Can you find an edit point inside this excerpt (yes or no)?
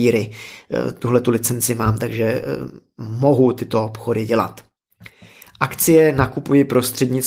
no